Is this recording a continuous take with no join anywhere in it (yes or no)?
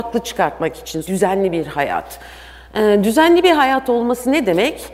no